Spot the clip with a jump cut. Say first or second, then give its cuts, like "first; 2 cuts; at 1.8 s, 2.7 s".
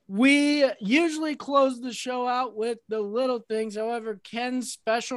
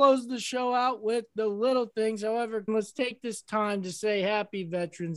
second; 1 cut; at 2.7 s